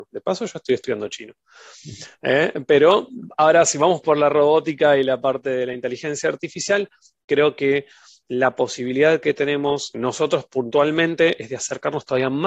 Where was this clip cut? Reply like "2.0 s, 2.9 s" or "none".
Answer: 9.9 s